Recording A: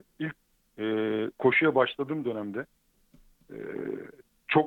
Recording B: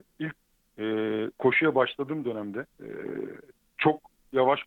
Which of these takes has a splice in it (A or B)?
B